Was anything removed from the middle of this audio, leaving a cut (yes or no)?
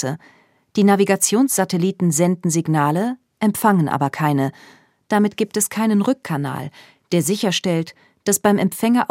no